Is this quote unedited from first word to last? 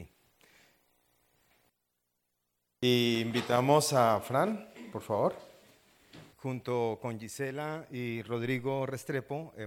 no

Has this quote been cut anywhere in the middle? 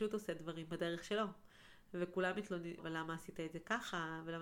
yes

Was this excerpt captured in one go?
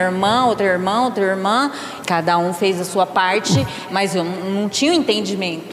no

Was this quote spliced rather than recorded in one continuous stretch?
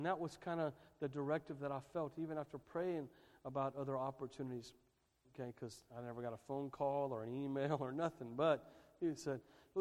yes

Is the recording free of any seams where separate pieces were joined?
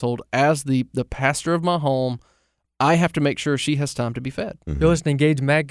yes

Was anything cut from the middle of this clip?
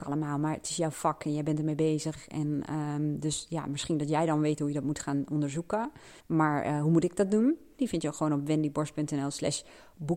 yes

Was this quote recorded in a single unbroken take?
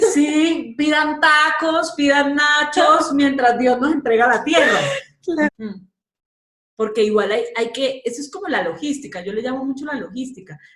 no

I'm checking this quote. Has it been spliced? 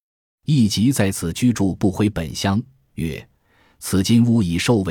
no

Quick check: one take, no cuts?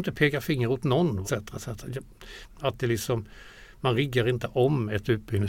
no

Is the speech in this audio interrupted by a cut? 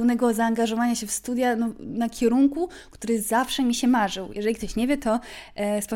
no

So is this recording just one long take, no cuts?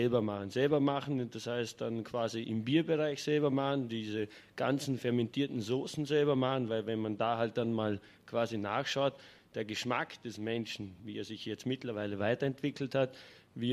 yes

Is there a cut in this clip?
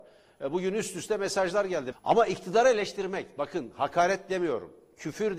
yes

